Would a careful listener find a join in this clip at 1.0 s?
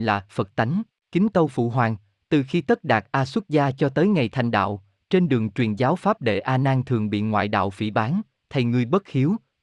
yes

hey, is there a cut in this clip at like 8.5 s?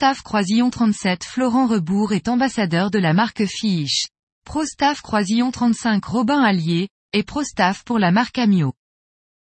no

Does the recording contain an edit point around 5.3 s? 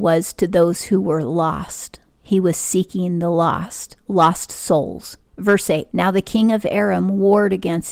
yes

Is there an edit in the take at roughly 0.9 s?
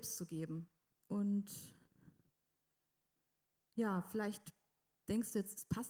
yes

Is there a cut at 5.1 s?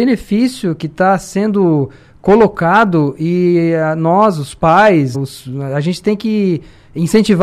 yes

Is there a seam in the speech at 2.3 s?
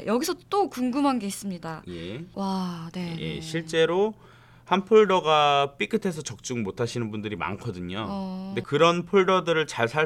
yes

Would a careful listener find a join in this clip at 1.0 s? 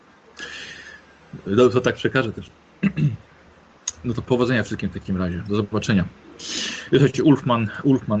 no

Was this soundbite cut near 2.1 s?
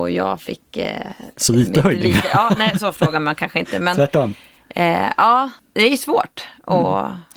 no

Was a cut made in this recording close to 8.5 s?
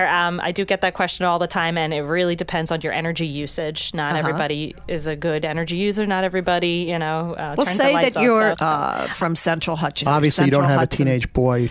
yes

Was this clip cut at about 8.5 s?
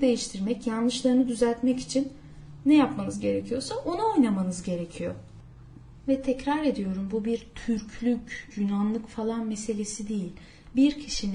yes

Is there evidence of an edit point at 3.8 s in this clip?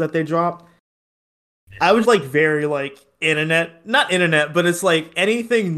no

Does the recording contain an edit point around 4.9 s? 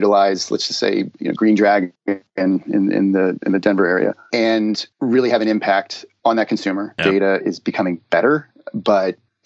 no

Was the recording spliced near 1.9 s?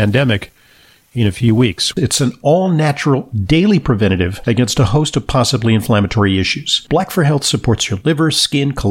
yes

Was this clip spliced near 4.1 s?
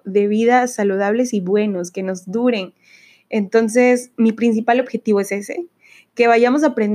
yes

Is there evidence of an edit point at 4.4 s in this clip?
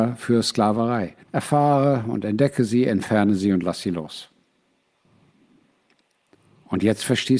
no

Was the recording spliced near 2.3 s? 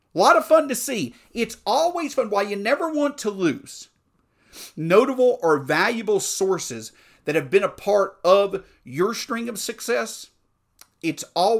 no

